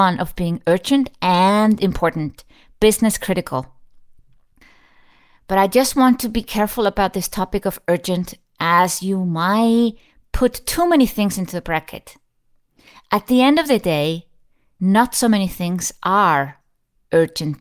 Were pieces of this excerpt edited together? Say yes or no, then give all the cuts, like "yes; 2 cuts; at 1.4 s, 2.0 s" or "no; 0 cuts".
no; 0 cuts